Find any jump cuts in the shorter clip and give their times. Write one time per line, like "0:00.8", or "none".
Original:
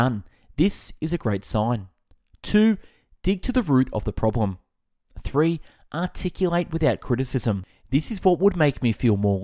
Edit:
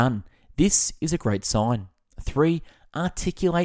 0:02.1